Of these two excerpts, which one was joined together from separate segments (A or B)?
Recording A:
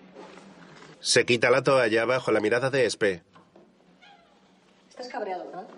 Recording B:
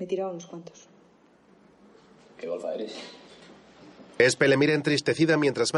A